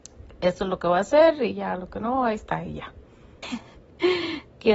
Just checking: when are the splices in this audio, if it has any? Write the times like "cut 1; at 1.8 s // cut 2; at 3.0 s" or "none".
cut 1; at 3.4 s

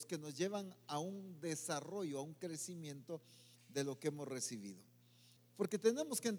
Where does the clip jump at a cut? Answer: cut 1; at 5.4 s

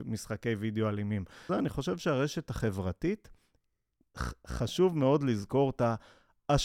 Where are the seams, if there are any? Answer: cut 1; at 1.5 s

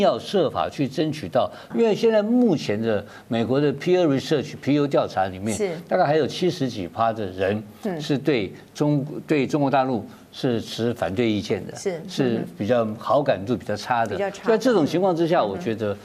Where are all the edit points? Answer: cut 1; at 1.7 s

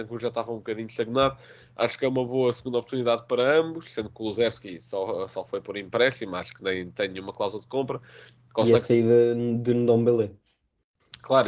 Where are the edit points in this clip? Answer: none

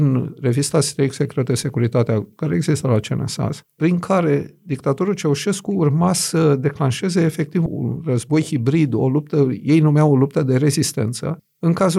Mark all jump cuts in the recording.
none

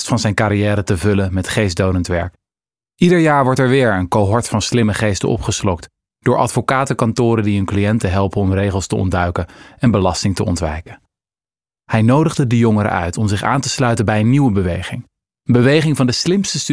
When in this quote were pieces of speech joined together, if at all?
cut 1; at 11.8 s

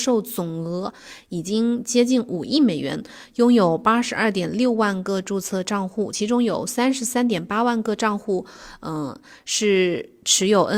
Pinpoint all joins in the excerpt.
none

